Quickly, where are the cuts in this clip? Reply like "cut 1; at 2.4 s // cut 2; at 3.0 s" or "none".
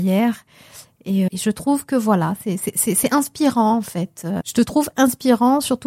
cut 1; at 1.3 s // cut 2; at 4.4 s